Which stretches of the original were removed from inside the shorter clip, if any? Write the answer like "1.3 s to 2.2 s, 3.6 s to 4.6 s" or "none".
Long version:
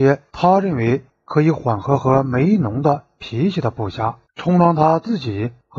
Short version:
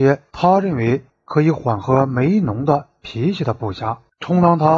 1.8 s to 2.0 s